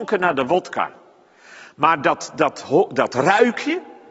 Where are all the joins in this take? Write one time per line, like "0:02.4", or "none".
none